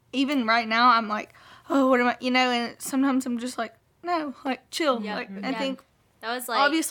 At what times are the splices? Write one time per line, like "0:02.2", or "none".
0:05.4

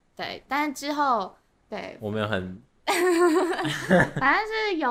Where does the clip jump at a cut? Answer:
0:01.5

